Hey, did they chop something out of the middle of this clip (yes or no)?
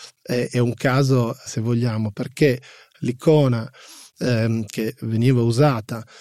yes